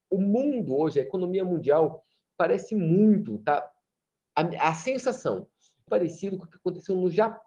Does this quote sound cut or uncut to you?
cut